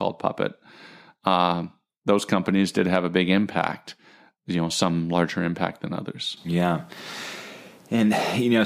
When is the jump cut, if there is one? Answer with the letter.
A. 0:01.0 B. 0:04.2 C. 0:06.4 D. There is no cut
D